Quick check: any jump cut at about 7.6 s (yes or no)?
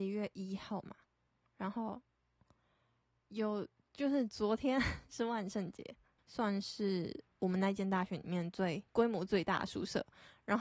no